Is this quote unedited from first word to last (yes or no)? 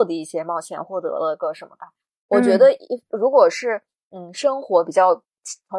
yes